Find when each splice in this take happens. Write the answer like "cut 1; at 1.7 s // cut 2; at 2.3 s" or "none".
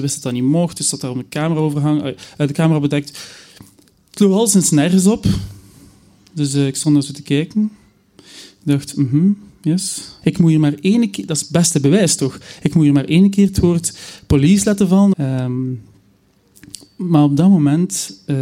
cut 1; at 10.2 s // cut 2; at 15.1 s